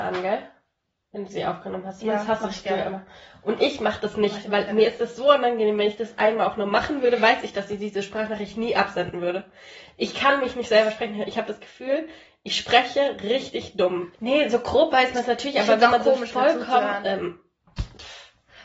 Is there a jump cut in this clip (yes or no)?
yes